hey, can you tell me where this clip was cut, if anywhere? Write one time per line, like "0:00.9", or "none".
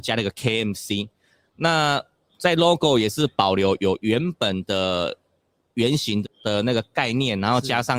0:06.2